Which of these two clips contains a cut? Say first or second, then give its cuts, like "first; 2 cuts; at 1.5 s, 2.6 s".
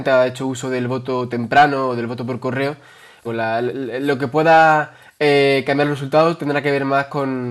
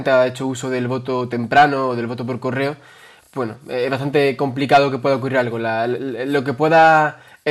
first; 1 cut; at 3.2 s